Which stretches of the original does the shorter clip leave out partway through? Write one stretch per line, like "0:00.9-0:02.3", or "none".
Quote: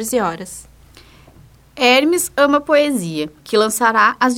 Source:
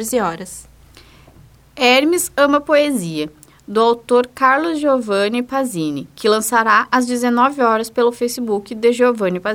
0:03.4-0:06.1